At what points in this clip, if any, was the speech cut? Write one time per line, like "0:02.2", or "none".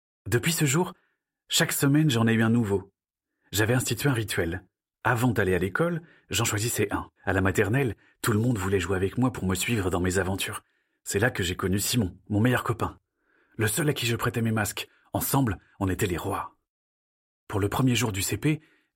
0:07.2